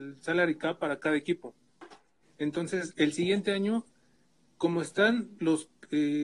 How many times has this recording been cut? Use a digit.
1